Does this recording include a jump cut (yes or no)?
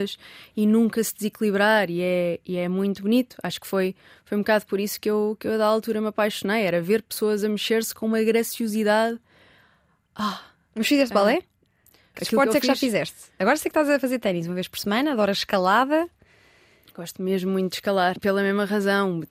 yes